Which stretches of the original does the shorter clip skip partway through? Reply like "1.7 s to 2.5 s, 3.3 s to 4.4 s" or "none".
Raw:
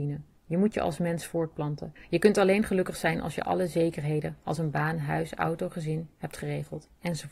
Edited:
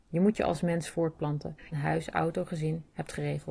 2.1 s to 5.0 s